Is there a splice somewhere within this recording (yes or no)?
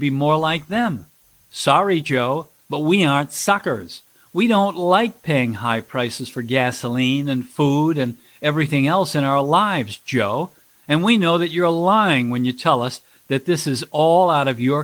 no